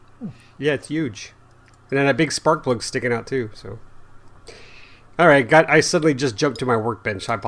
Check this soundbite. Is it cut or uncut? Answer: uncut